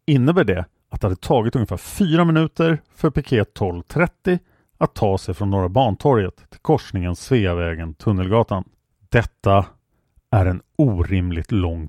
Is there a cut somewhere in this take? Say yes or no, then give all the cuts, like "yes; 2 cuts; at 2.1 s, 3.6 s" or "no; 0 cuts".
no; 0 cuts